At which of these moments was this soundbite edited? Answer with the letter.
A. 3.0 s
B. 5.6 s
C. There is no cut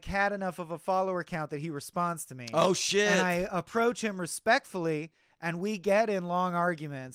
C